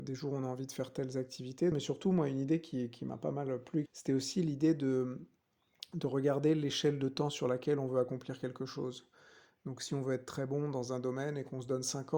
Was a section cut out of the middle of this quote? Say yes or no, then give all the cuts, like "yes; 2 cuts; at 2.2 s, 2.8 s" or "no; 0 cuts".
yes; 2 cuts; at 1.7 s, 3.9 s